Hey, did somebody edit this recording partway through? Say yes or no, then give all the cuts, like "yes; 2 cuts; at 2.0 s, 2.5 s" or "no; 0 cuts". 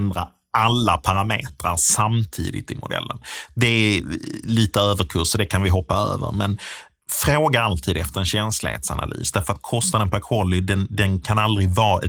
no; 0 cuts